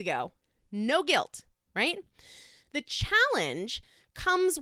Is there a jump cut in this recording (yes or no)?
no